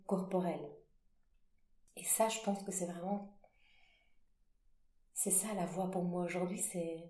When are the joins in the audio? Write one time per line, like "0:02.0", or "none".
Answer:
none